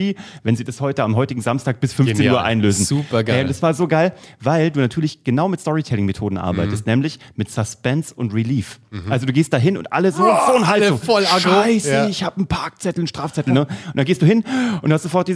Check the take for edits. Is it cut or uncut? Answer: uncut